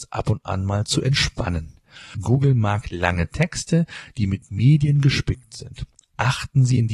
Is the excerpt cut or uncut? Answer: cut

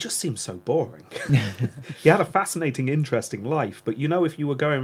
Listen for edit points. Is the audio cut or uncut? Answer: uncut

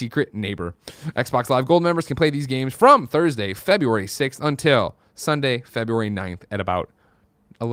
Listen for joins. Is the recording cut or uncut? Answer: uncut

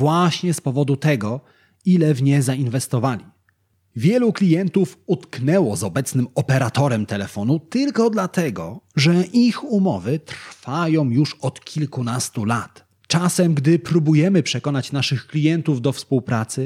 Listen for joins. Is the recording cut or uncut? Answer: cut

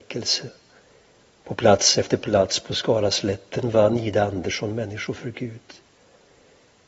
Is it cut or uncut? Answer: uncut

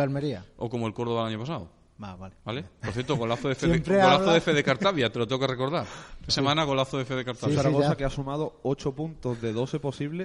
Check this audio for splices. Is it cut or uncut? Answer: cut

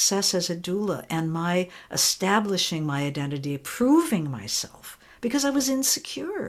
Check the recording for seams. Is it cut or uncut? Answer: uncut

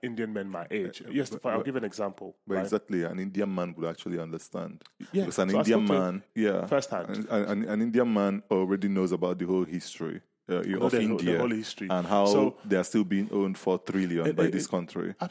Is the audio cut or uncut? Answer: cut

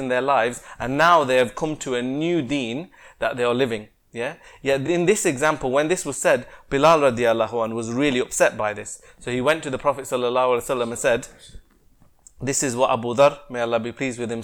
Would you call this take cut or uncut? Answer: uncut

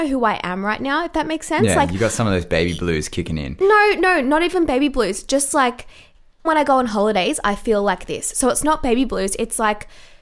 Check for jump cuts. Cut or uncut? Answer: cut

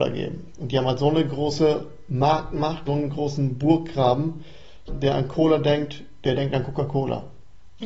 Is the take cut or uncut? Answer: cut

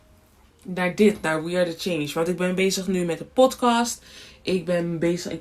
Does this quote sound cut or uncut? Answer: uncut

